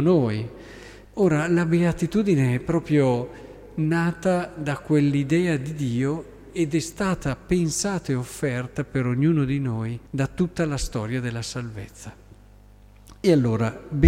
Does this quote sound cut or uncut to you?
cut